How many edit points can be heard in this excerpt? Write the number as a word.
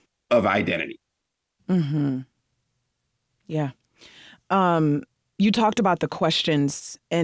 one